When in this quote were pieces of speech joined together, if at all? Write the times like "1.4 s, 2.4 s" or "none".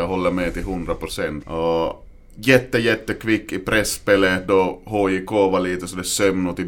1.4 s